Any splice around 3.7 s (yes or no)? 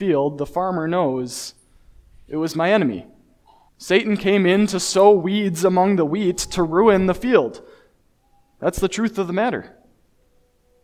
yes